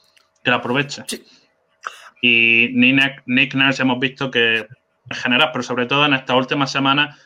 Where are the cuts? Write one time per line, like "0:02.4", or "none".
0:02.1
0:05.1